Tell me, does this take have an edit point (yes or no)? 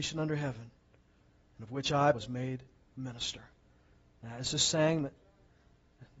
yes